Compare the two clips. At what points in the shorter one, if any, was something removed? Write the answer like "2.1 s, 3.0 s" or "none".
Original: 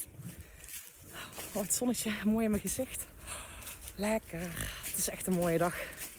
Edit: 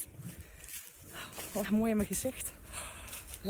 1.6 s